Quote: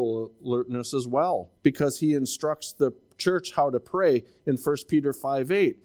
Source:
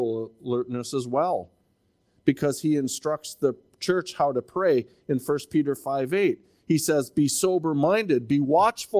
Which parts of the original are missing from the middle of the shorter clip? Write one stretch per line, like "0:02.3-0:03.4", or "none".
0:01.6-0:02.2